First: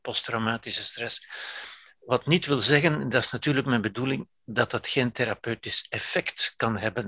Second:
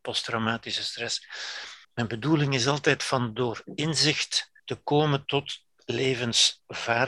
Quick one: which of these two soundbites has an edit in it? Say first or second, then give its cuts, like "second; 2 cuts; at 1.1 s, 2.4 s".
second; 2 cuts; at 1.8 s, 4.6 s